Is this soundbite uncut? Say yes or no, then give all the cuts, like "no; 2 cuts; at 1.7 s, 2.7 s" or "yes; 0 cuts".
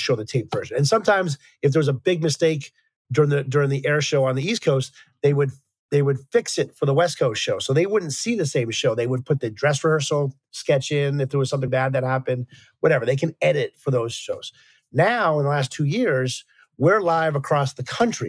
no; 1 cut; at 11.7 s